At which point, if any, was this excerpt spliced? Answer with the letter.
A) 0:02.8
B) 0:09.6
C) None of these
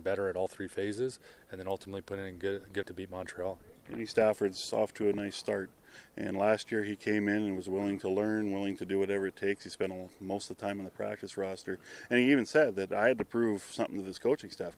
A